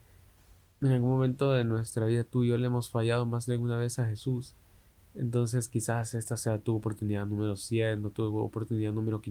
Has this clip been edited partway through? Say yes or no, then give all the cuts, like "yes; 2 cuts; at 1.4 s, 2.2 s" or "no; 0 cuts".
no; 0 cuts